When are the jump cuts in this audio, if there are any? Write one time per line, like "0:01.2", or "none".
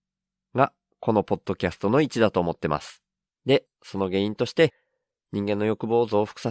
0:03.2